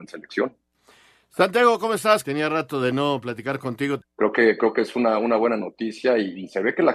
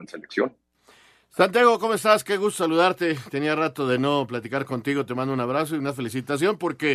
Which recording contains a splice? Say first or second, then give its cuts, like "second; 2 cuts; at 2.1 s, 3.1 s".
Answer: first; 2 cuts; at 2.2 s, 4.0 s